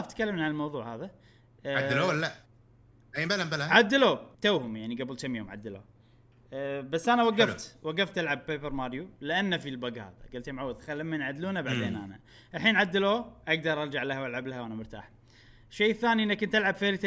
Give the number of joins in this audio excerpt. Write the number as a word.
one